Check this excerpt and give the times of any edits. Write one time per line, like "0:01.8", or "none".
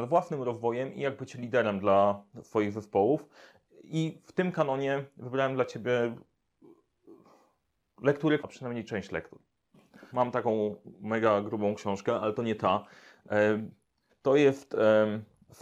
0:08.4
0:10.1
0:14.1